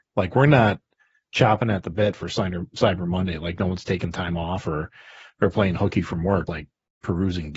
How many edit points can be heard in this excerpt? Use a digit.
1